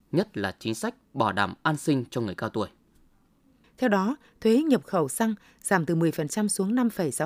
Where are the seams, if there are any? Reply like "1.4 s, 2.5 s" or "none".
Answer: 3.6 s